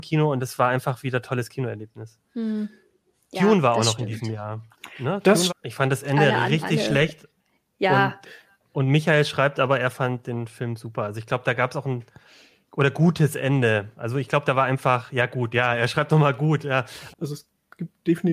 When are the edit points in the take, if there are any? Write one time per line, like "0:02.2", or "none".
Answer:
0:05.5
0:17.1